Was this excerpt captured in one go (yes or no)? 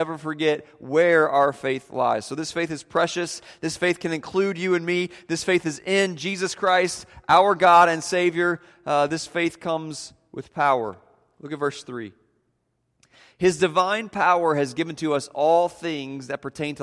yes